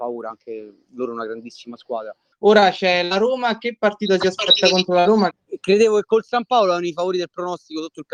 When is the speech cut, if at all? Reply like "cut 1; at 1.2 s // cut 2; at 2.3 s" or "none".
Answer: cut 1; at 2.3 s // cut 2; at 5.3 s